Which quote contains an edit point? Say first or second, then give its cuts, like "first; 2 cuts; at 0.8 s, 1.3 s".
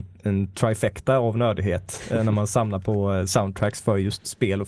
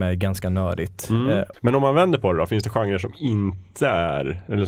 second; 1 cut; at 1.5 s